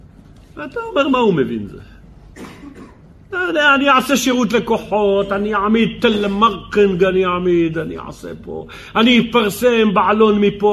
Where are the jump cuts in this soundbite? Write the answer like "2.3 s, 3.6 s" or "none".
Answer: none